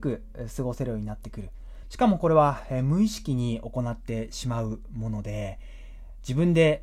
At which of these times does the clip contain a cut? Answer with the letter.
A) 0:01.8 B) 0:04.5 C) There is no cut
A